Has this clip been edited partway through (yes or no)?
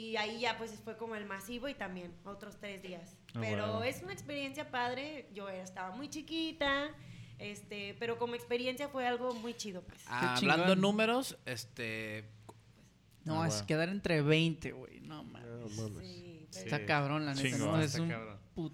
yes